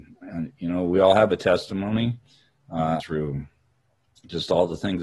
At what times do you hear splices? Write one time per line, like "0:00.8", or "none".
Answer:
0:03.0